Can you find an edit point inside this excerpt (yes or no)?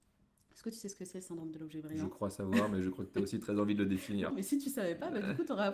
yes